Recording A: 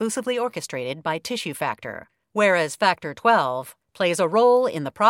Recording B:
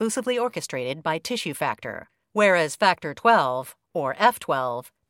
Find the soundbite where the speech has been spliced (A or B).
A